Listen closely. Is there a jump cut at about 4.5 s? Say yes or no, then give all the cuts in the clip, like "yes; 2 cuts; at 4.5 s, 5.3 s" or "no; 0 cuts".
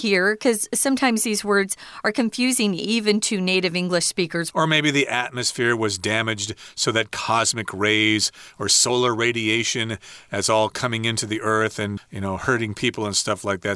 yes; 2 cuts; at 4.5 s, 12.0 s